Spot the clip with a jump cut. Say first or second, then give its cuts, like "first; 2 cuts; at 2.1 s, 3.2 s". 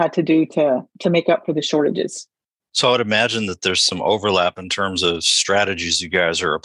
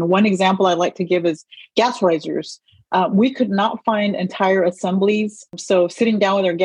first; 1 cut; at 0.9 s